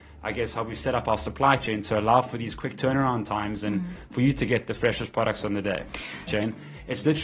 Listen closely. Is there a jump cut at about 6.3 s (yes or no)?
yes